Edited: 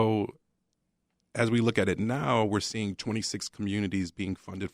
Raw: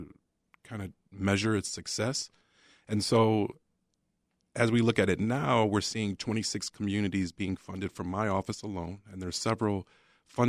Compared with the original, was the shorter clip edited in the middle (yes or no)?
no